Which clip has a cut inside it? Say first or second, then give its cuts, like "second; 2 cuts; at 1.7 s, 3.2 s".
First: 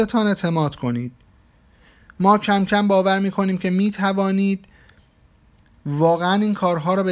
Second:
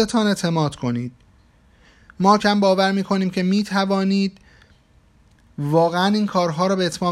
second; 1 cut; at 2.4 s